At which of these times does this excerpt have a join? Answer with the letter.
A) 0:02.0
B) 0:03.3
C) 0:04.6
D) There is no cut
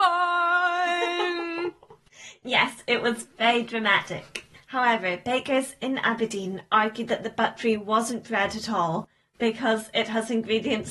D